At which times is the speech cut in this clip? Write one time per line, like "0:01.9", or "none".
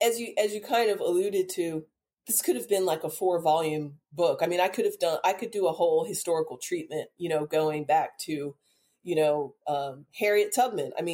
none